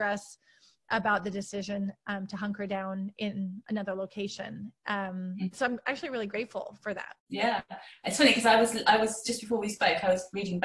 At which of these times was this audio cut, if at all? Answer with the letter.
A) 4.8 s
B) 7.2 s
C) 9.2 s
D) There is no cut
B